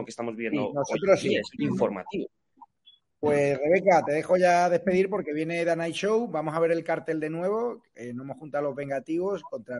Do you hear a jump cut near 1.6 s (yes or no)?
yes